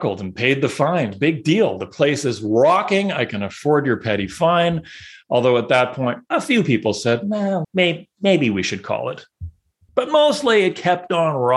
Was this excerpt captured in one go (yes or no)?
no